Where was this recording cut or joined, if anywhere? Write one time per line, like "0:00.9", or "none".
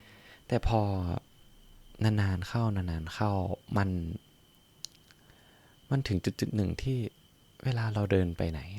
none